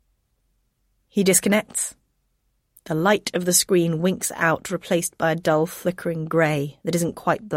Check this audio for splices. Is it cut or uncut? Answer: uncut